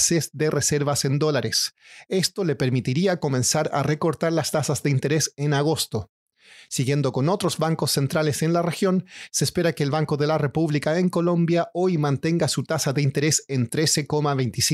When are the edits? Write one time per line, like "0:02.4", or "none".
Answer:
0:02.0